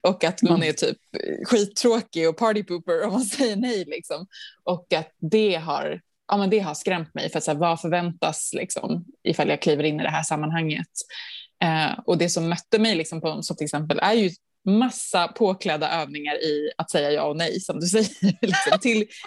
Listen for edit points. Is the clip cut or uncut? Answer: cut